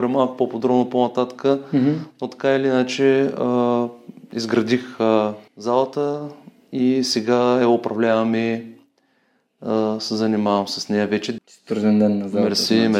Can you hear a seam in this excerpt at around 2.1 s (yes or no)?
no